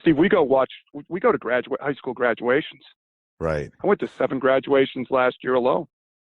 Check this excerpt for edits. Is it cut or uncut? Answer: uncut